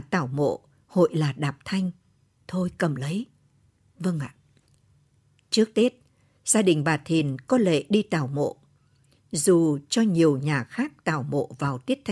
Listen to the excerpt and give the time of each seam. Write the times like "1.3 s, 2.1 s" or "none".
2.4 s